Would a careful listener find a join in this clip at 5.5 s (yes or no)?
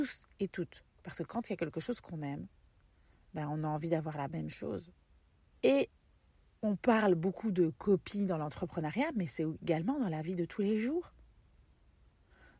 yes